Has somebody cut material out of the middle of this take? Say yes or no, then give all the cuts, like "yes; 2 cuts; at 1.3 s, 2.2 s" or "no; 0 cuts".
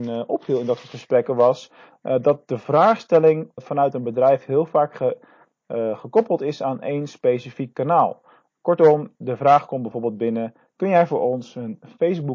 yes; 1 cut; at 3.6 s